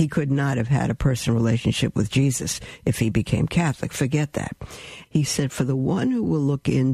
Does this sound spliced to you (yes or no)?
yes